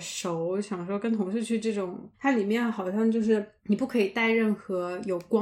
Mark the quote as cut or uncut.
cut